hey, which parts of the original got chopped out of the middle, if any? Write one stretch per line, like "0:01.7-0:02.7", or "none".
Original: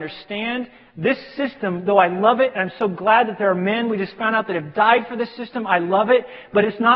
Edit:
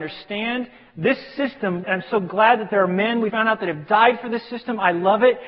0:01.8-0:02.5
0:04.0-0:04.2